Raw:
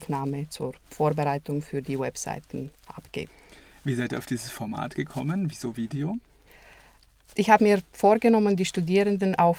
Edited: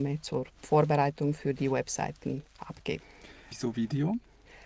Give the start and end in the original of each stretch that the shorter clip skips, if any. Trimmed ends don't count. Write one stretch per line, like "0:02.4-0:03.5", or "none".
0:03.8-0:05.5